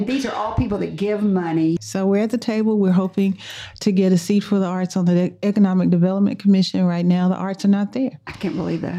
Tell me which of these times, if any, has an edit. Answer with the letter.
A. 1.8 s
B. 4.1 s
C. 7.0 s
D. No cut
A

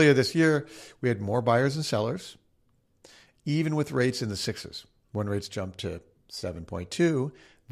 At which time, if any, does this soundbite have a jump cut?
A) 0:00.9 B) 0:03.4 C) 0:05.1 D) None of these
D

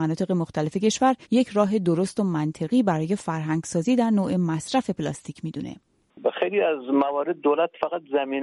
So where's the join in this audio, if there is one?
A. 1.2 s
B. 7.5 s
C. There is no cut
A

